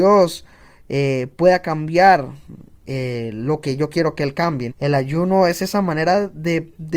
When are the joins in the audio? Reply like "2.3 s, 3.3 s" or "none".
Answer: 4.7 s